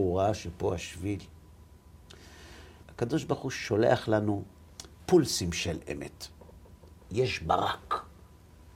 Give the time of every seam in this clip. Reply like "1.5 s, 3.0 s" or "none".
2.8 s, 7.0 s